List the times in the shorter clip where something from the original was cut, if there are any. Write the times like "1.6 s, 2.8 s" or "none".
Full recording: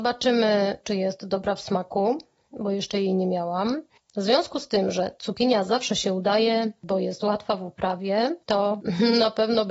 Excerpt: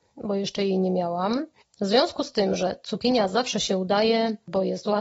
none